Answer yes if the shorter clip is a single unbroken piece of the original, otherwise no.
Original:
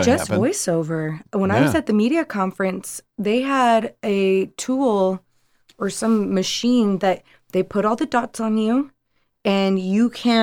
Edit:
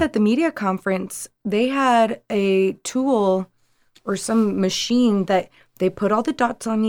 yes